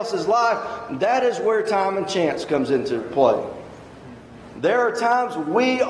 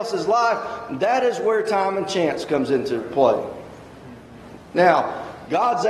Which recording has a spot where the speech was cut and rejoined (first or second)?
second